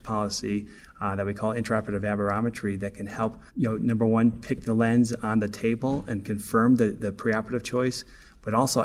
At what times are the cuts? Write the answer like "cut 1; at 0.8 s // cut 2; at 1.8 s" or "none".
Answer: cut 1; at 3.5 s